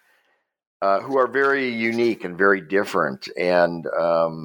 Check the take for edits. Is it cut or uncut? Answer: uncut